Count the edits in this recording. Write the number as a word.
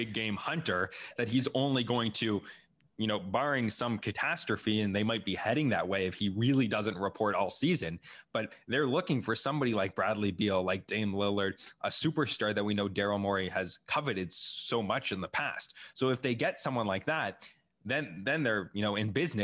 zero